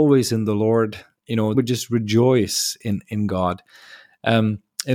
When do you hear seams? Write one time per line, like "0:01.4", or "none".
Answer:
0:01.5